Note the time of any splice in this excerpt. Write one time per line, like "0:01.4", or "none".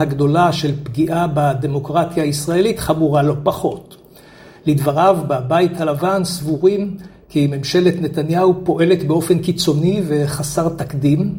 0:04.6